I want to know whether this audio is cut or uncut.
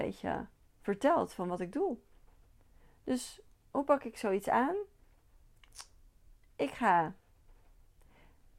uncut